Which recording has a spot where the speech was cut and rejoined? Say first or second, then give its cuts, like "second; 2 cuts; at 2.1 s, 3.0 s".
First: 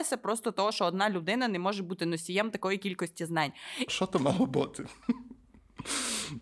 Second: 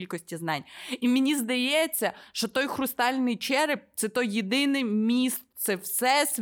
first; 1 cut; at 3.9 s